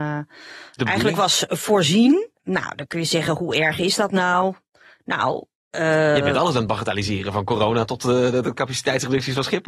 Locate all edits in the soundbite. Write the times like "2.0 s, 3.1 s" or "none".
2.3 s

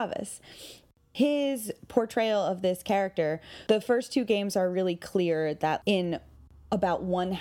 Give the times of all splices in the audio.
3.7 s, 5.8 s

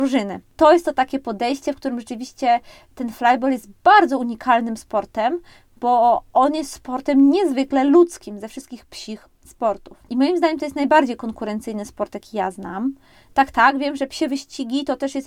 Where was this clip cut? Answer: 10.1 s

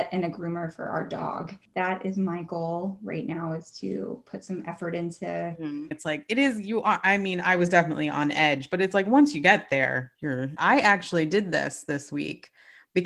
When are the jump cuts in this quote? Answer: 5.9 s, 10.6 s

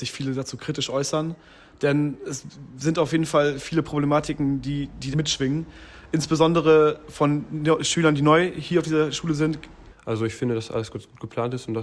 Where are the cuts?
5.1 s, 9.9 s

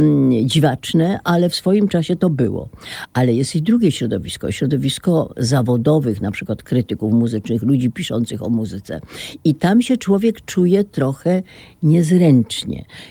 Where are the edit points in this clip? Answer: none

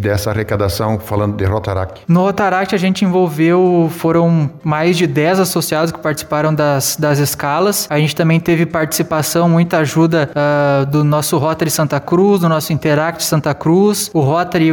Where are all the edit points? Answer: none

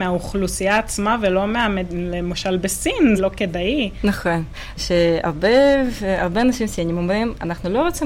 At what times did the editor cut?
3.2 s, 4.8 s

